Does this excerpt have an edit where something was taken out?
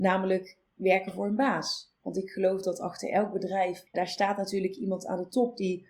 yes; 1 cut; at 3.9 s

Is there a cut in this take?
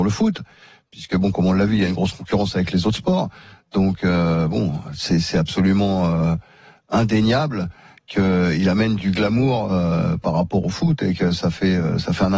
yes; 1 cut; at 9.0 s

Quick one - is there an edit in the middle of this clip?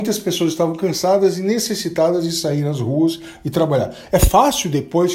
no; 0 cuts

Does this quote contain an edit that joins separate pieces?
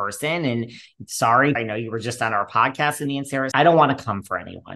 yes; 2 cuts; at 1.5 s, 3.5 s

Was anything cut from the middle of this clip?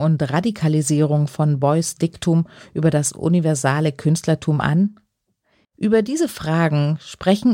yes; 1 cut; at 5.6 s

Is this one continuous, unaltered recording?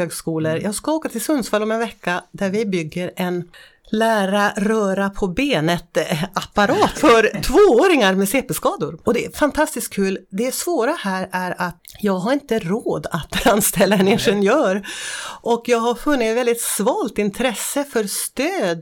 no; 2 cuts; at 6.9 s, 9.0 s

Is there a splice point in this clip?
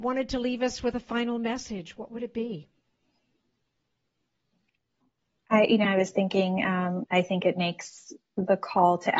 yes; 2 cuts; at 5.8 s, 7.0 s

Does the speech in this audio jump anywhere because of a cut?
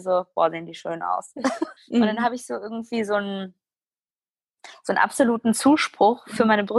yes; 1 cut; at 1.8 s

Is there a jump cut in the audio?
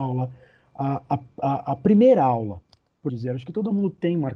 yes; 1 cut; at 3.1 s

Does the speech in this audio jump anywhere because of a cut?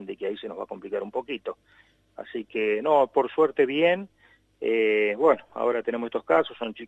no; 0 cuts

